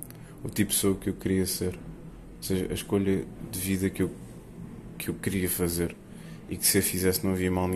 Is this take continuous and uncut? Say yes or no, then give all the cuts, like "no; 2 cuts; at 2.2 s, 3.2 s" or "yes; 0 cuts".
yes; 0 cuts